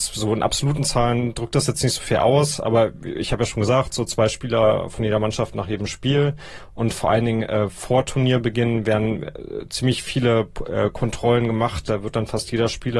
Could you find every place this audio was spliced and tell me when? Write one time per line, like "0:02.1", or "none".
none